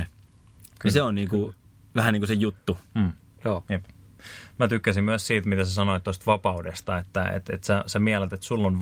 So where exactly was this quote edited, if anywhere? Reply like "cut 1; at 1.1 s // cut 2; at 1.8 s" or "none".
none